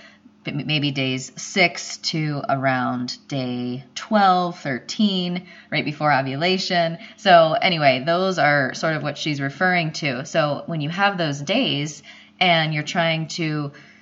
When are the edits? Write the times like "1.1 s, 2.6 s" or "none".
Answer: none